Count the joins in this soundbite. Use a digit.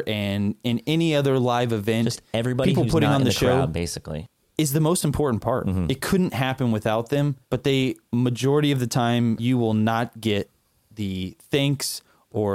1